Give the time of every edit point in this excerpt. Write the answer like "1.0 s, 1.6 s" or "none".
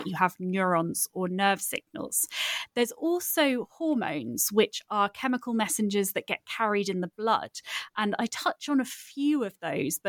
none